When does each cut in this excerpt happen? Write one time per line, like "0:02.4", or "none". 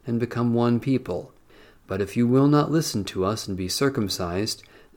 none